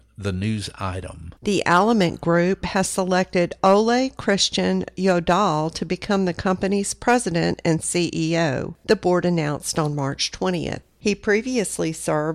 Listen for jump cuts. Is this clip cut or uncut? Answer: cut